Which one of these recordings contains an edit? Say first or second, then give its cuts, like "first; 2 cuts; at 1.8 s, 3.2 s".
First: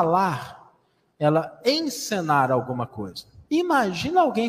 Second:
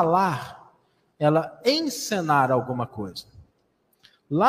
first; 1 cut; at 3.5 s